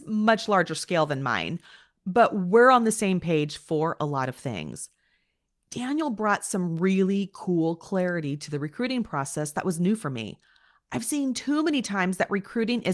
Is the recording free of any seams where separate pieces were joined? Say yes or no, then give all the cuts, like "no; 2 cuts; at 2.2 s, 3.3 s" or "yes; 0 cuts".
yes; 0 cuts